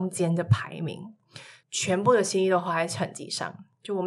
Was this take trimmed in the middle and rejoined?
yes; 1 cut; at 1.6 s

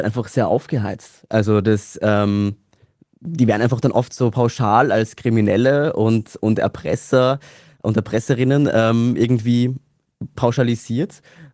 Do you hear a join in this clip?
no; 0 cuts

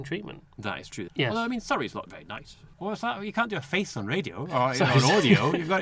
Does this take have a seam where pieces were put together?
yes; 2 cuts; at 1.1 s, 2.7 s

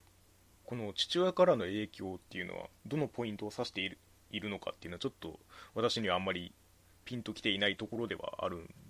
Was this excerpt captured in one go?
no; 1 cut; at 2.8 s

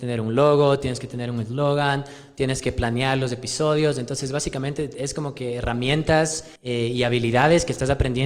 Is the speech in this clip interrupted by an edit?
yes; 1 cut; at 6.6 s

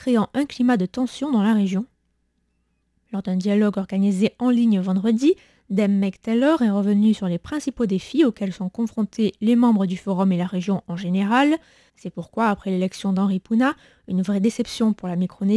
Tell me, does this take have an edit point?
yes; 1 cut; at 11.9 s

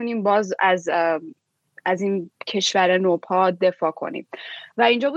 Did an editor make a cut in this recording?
yes; 1 cut; at 2.4 s

